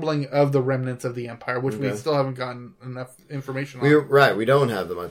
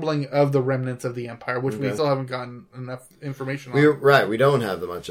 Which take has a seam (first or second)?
second